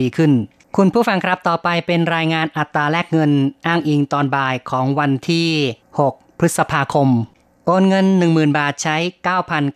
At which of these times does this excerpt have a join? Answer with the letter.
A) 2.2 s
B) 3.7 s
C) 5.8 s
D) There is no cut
C